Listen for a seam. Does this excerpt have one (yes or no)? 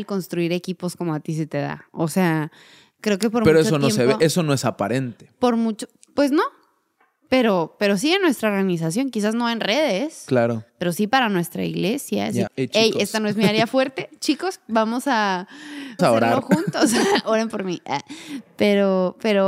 yes